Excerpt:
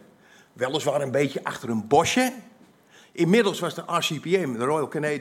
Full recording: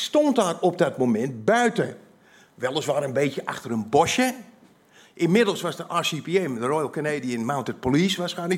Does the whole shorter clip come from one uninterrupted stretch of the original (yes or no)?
yes